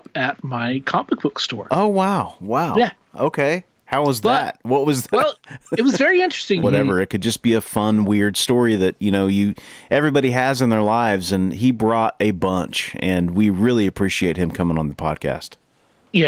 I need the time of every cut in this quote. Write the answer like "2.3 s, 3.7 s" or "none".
6.6 s